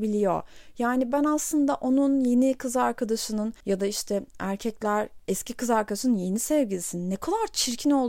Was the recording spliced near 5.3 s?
no; 0 cuts

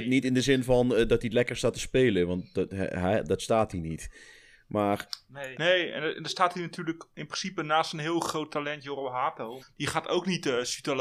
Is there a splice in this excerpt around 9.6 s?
yes; 2 cuts; at 5.5 s, 9.6 s

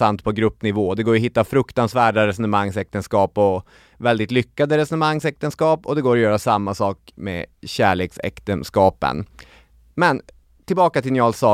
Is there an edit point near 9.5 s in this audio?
no; 0 cuts

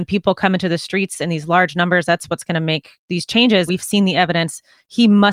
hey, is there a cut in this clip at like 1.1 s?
no; 1 cut; at 3.7 s

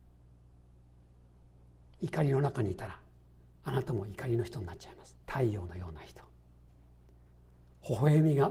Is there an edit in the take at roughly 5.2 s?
yes; 1 cut; at 5.2 s

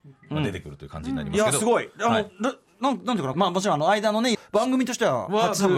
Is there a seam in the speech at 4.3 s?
yes; 2 cuts; at 3.3 s, 4.3 s

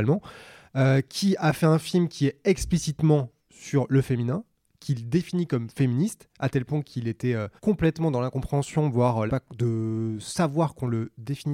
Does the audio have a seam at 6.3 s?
no; 3 cuts; at 3.4 s, 7.6 s, 9.3 s

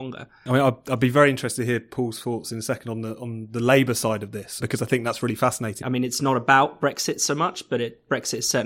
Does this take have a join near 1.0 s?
no; 2 cuts; at 4.6 s, 5.8 s

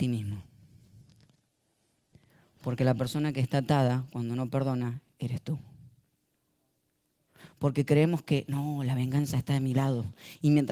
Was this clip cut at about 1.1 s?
no; 0 cuts

